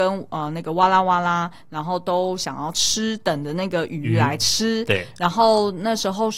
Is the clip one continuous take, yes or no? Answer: yes